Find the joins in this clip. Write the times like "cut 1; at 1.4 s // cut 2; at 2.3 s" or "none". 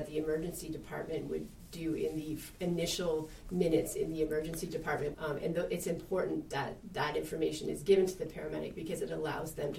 cut 1; at 5.1 s